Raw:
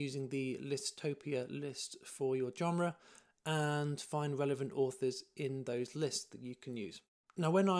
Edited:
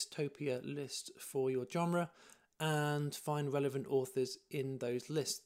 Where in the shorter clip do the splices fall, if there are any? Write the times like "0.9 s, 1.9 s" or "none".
none